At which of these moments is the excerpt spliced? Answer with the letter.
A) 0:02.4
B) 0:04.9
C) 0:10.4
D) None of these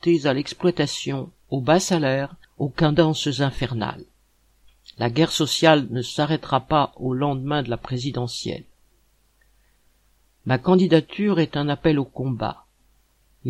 A